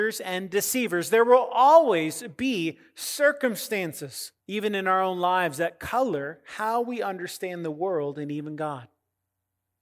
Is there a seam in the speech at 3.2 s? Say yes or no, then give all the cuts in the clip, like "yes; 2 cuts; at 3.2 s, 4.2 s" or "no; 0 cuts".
no; 1 cut; at 4.4 s